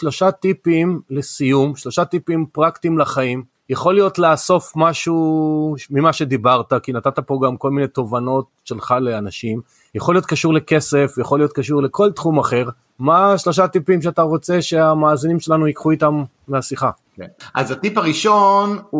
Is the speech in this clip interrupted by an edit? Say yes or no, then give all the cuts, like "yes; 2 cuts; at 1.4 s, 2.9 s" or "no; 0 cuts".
yes; 1 cut; at 9.9 s